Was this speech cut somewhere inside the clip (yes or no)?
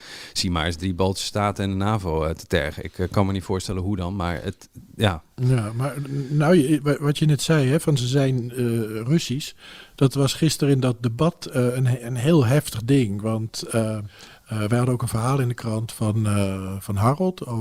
no